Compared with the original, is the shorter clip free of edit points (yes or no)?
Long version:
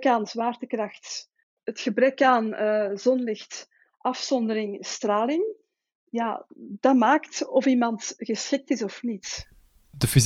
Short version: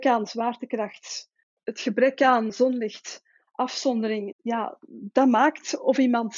no